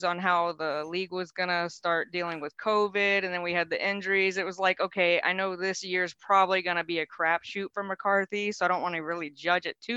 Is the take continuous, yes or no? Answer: yes